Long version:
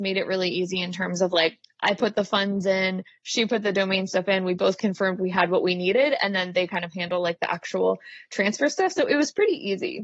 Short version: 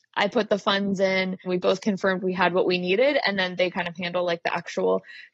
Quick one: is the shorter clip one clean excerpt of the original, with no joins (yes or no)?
no